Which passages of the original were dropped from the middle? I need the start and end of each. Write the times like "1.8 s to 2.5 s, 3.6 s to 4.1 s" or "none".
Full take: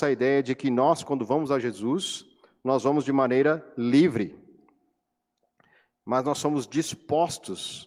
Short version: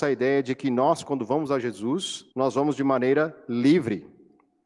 2.3 s to 2.6 s